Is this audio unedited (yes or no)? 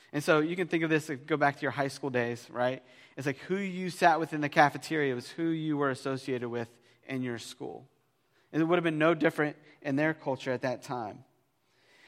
yes